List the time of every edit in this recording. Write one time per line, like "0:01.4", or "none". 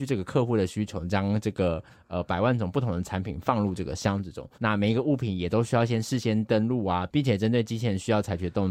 0:04.5